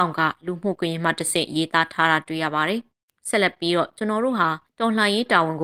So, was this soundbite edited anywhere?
no; 0 cuts

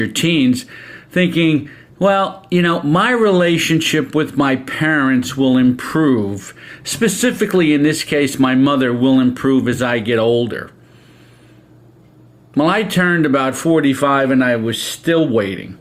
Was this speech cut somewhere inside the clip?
no; 0 cuts

